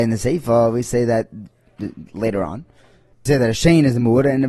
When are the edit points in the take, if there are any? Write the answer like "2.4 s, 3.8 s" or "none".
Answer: 3.1 s